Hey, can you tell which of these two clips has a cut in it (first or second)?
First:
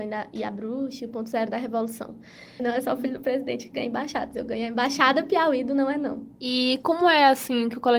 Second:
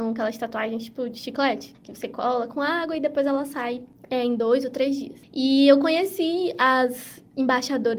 first